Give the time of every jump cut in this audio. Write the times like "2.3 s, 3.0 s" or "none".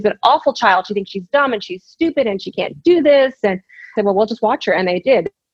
4.0 s